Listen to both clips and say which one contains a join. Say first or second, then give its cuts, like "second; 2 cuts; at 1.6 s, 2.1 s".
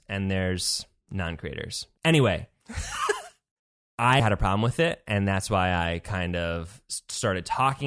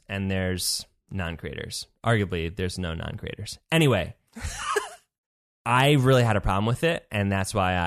first; 2 cuts; at 2.0 s, 4.2 s